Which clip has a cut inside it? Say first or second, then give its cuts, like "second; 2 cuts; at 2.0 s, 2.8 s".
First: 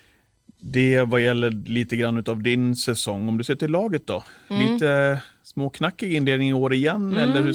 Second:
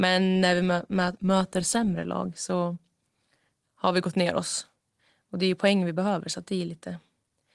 second; 1 cut; at 1.2 s